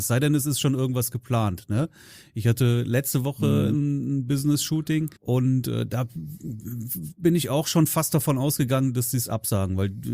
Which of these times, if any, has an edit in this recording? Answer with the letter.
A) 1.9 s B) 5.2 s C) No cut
B